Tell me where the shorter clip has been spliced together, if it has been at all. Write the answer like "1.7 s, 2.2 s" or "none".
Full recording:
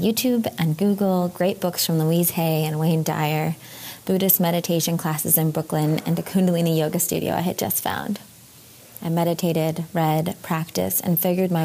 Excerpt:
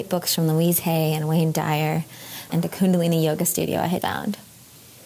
2.5 s, 4.0 s

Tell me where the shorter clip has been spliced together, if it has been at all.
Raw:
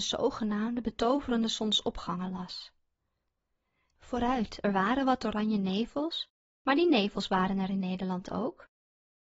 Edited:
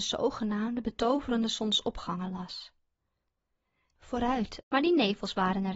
4.6 s

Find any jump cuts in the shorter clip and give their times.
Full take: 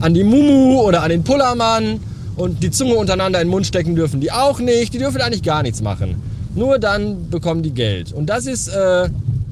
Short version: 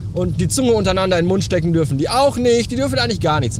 none

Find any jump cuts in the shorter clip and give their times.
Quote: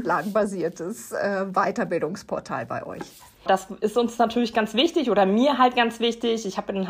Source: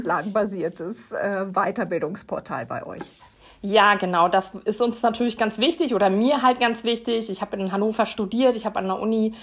3.5 s

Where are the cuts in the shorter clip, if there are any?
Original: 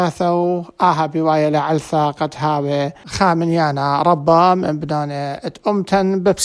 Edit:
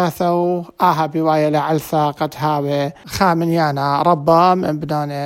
none

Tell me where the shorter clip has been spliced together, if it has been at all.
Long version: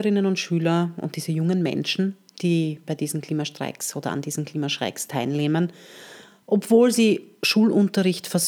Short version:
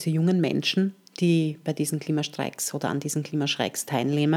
none

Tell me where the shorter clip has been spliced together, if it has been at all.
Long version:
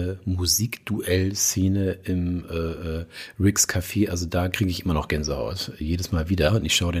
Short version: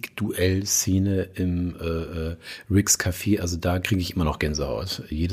none

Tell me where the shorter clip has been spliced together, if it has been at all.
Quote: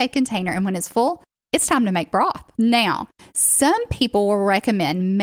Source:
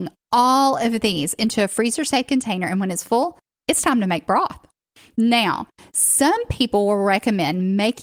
2.5 s

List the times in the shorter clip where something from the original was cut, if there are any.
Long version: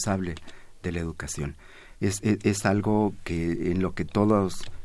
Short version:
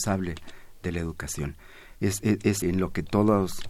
2.6 s

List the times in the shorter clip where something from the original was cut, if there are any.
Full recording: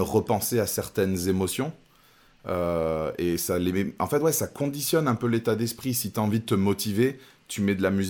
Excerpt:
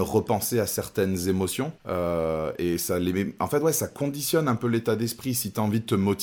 1.8 s

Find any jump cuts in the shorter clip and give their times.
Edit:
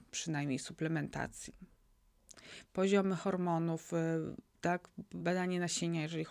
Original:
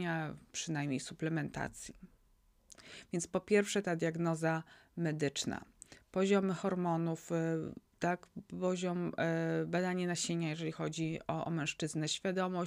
2.7 s, 5.2 s

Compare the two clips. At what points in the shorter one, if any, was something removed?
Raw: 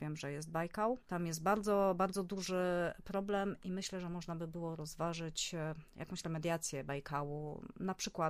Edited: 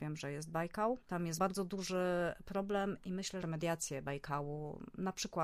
1.4 s, 3.4 s

